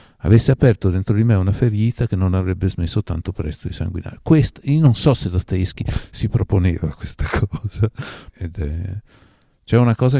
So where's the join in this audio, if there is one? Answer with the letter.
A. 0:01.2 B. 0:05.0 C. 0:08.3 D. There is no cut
C